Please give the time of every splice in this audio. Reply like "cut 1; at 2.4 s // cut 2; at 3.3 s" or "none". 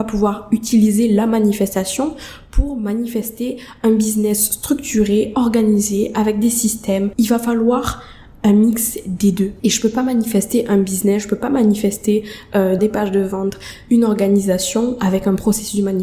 cut 1; at 12.8 s